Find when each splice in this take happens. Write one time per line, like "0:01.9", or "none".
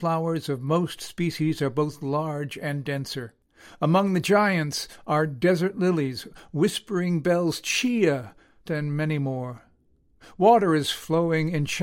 0:08.7